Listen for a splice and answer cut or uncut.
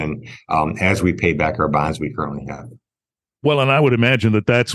uncut